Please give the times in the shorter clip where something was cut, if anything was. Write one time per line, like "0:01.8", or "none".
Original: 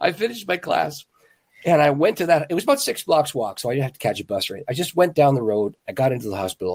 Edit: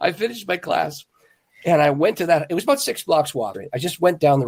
0:03.5